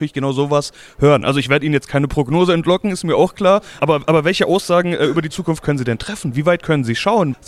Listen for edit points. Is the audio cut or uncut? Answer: cut